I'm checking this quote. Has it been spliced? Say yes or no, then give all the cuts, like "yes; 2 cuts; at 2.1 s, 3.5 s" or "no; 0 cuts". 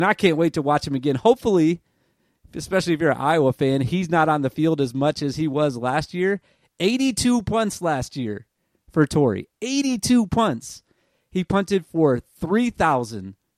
no; 0 cuts